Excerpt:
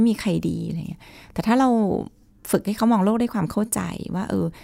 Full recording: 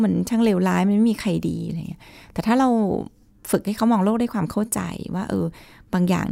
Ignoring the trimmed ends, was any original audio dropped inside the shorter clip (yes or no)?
no